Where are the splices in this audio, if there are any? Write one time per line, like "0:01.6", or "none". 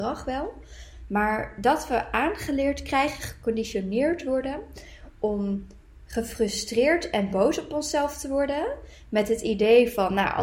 0:01.1